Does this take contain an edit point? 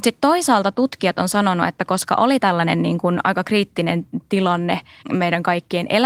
yes; 1 cut; at 5.0 s

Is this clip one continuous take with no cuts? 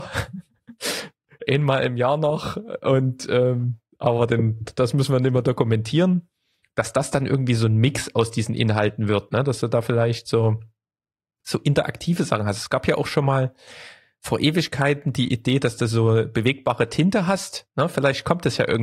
yes; 0 cuts

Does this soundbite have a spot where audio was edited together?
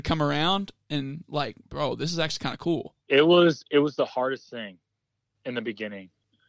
yes; 1 cut; at 3.0 s

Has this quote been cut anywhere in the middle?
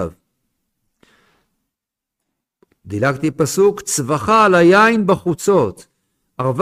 no; 0 cuts

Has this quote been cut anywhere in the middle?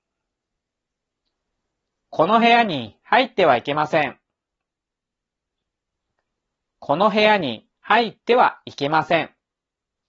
no; 0 cuts

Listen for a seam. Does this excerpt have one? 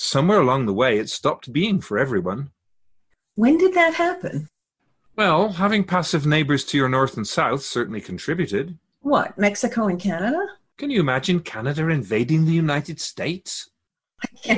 no; 0 cuts

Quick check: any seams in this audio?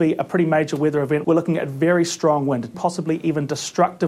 yes; 2 cuts; at 1.2 s, 2.7 s

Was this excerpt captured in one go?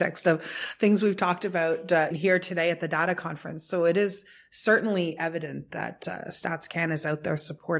no; 1 cut; at 2.1 s

